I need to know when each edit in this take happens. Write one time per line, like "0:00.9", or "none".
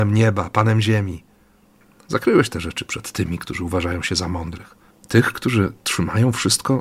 0:04.9